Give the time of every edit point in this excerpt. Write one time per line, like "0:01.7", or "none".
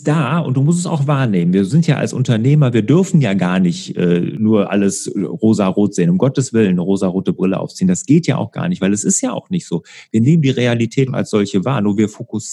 0:11.1